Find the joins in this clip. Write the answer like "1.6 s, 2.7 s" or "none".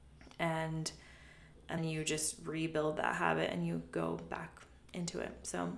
1.8 s